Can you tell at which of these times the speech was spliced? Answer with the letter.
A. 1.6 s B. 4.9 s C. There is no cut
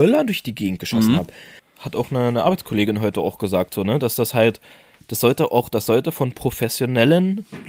A